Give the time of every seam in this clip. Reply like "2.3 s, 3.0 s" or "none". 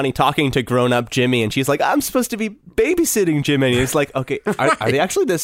none

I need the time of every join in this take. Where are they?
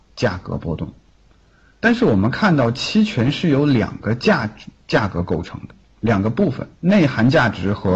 6.8 s

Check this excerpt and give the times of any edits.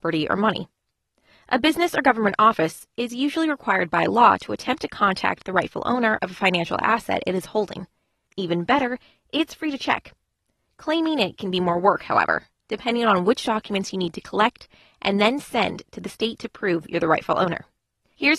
8.2 s

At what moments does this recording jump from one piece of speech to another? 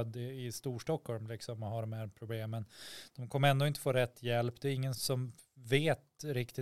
4.9 s

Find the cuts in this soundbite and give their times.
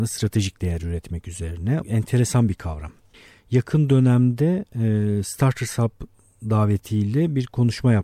1.8 s

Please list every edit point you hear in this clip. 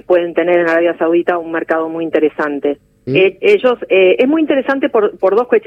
3.1 s

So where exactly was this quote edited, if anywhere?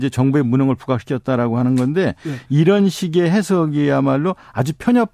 none

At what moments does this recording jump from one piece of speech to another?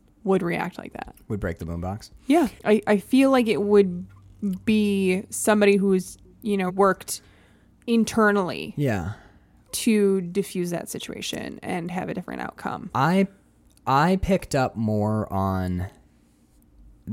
6.7 s

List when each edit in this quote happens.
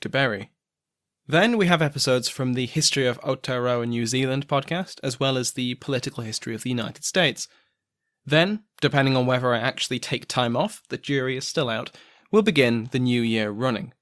none

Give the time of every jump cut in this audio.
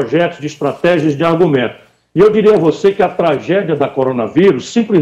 none

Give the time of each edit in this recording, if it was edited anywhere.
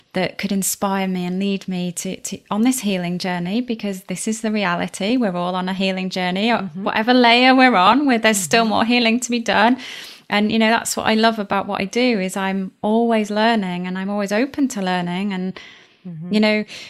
none

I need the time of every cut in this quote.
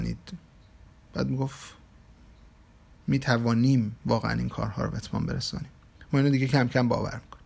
none

